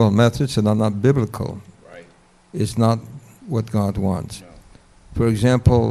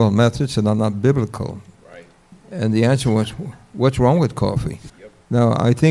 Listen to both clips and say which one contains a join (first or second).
second